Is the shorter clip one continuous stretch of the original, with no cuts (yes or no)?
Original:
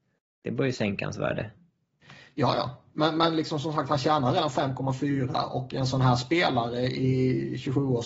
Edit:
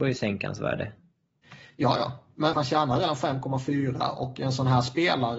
no